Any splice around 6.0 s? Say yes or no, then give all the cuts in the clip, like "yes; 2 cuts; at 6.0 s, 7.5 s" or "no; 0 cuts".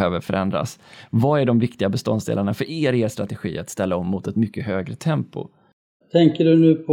yes; 1 cut; at 6.0 s